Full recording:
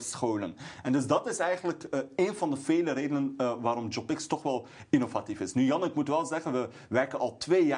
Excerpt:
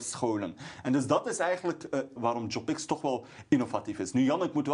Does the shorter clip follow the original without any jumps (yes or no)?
no